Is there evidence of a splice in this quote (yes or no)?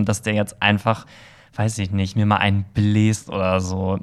no